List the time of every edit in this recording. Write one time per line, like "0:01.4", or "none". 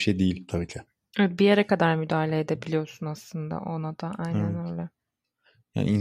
none